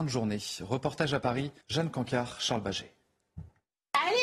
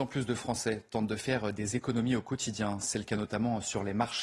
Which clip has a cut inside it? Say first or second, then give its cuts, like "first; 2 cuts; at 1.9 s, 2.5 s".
first; 1 cut; at 1.6 s